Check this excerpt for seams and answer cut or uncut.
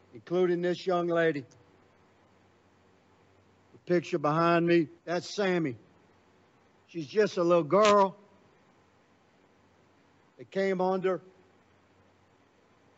cut